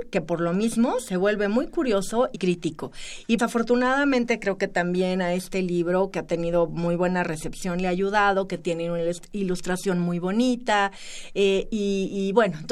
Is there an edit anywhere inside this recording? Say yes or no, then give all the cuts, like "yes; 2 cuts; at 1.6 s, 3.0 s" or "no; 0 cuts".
yes; 2 cuts; at 2.3 s, 3.4 s